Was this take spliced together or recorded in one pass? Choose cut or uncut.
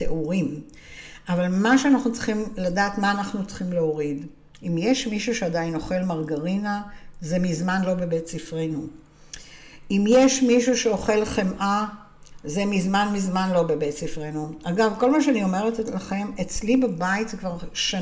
uncut